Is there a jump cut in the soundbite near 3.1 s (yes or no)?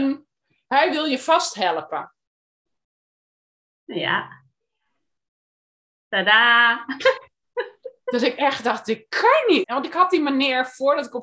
no